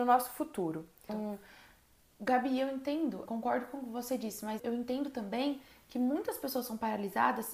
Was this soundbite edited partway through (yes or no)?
yes